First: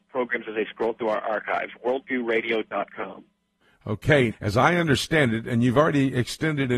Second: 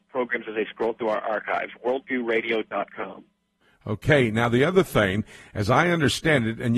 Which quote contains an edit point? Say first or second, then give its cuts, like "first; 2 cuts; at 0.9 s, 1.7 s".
first; 1 cut; at 4.3 s